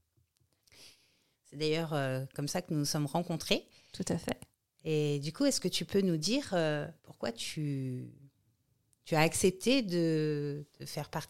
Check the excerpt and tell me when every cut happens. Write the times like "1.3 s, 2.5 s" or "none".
1.3 s, 7.0 s